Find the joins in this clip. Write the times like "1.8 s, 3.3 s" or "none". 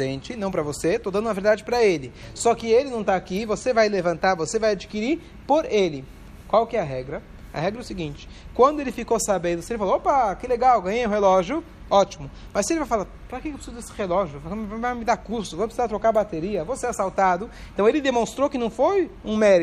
none